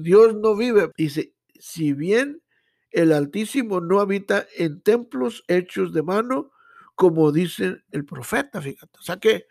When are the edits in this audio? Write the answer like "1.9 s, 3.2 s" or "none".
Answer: 0.9 s